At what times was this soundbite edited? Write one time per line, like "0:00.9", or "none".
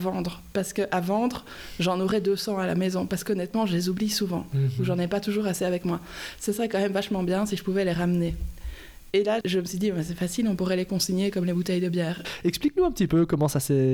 0:09.4
0:12.2